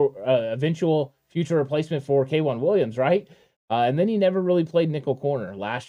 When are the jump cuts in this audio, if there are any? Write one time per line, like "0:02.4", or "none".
none